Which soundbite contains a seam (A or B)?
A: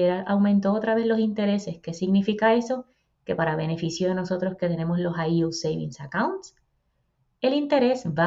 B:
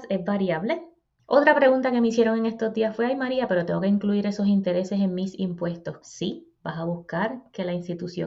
B